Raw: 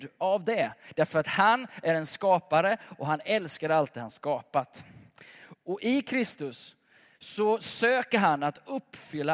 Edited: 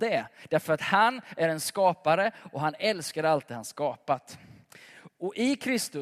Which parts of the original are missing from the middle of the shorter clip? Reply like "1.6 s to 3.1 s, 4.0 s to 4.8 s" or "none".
none